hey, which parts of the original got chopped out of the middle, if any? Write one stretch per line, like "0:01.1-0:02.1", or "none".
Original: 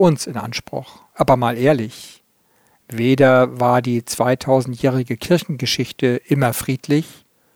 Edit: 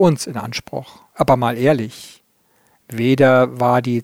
none